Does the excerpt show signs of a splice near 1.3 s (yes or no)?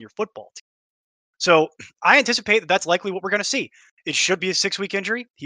no